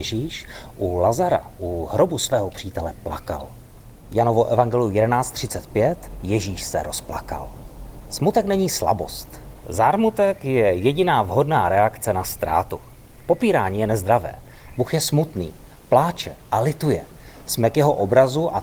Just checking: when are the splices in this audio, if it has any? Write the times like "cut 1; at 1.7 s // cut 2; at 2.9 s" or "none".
cut 1; at 9.6 s // cut 2; at 14.7 s